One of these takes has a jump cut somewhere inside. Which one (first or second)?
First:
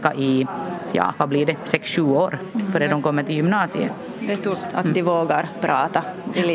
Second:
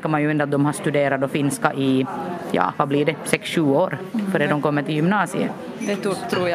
first